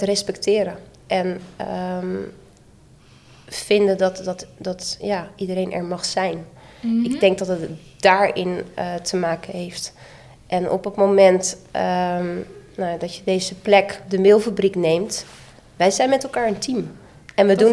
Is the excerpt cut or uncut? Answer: uncut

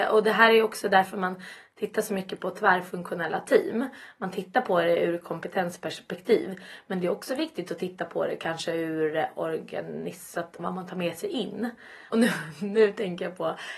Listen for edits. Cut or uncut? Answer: cut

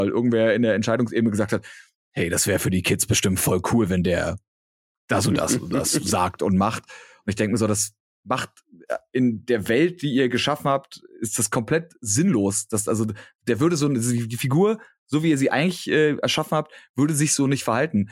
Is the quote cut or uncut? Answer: uncut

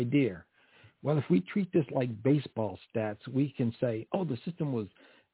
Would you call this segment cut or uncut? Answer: uncut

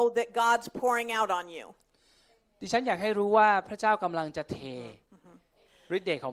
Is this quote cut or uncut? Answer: uncut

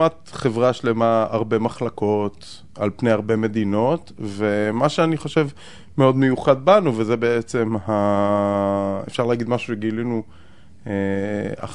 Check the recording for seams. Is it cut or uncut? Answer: uncut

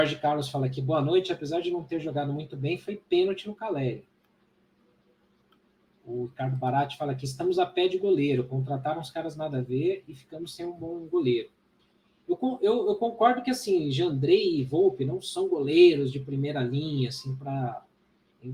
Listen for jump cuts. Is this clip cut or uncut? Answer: uncut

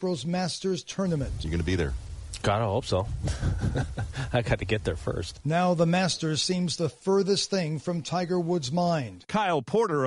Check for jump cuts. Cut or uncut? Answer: uncut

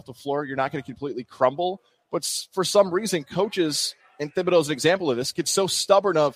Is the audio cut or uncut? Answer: uncut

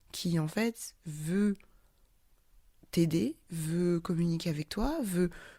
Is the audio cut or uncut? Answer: uncut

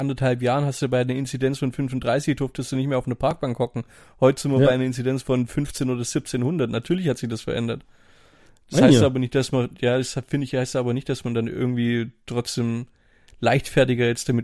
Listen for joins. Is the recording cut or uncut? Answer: uncut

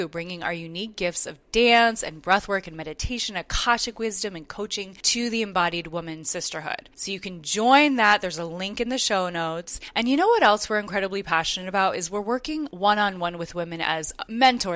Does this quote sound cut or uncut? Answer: uncut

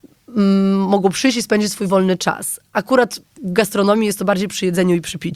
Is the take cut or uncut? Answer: uncut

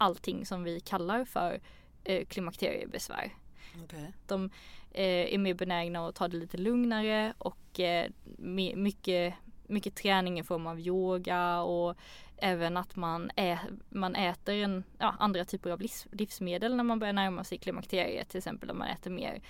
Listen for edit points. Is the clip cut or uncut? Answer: cut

